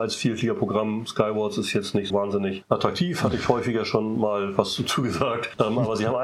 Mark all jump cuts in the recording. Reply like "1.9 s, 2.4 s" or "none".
2.1 s